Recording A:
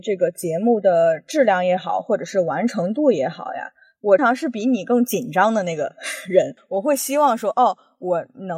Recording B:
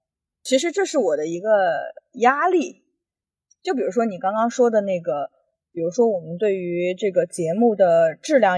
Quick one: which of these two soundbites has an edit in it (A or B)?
A